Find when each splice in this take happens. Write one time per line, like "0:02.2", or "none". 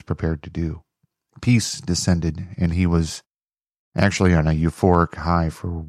0:01.3